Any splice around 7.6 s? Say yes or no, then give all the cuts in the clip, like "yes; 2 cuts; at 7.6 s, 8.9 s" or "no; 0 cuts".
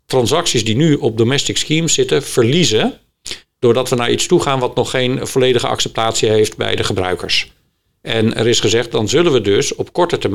no; 0 cuts